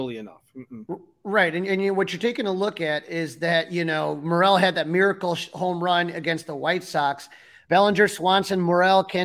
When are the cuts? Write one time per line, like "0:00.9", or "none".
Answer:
0:07.6